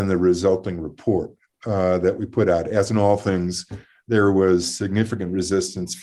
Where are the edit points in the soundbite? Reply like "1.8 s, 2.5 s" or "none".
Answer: none